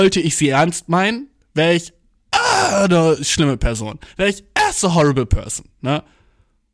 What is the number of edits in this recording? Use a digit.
0